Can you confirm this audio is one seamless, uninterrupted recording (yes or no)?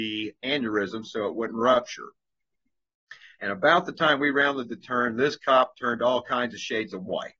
yes